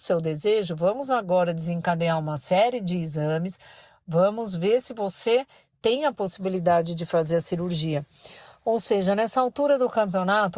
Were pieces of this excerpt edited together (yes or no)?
no